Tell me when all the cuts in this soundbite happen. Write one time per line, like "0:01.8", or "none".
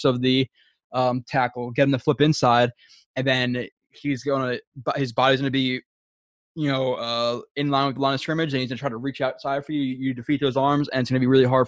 none